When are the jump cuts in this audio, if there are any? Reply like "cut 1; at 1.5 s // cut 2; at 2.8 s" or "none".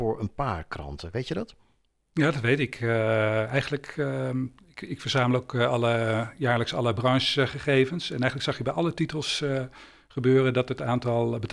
none